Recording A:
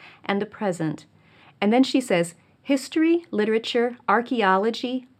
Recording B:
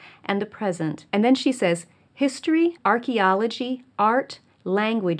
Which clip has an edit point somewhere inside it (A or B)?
B